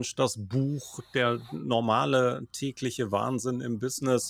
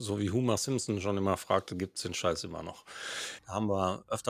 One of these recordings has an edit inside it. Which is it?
second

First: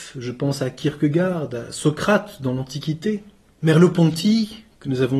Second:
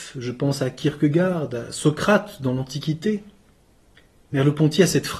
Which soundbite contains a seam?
first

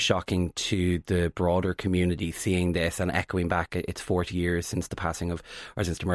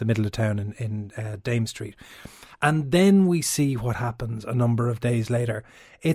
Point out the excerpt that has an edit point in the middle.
second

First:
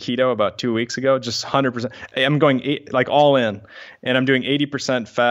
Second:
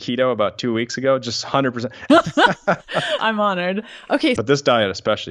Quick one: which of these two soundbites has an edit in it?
second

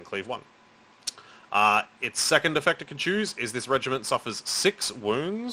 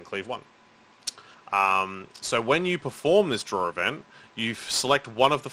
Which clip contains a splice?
second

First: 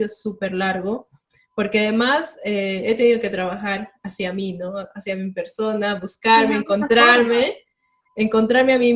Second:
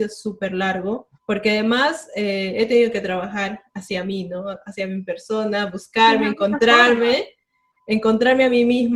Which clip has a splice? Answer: second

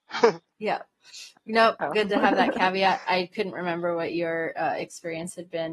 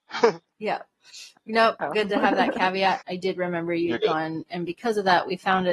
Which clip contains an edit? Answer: second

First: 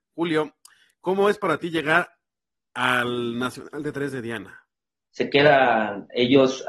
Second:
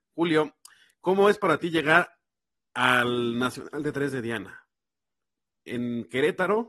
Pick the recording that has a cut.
first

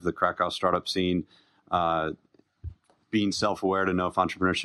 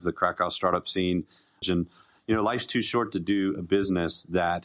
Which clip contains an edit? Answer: second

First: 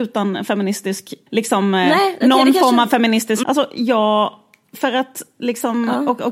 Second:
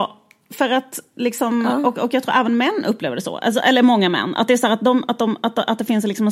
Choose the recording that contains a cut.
first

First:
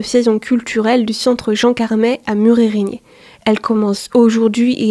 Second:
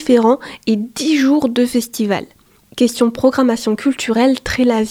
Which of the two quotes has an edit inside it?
second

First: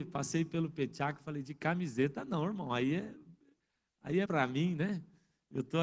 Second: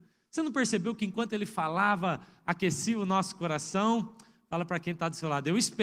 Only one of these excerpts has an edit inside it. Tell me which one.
first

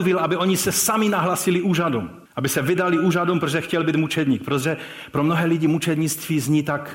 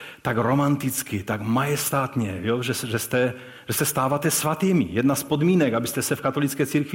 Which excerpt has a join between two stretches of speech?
first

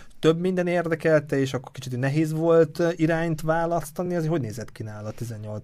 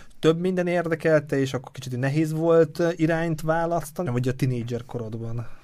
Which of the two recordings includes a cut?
second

